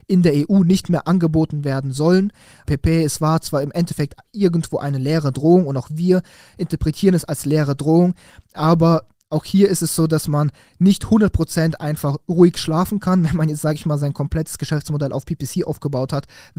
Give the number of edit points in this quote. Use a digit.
1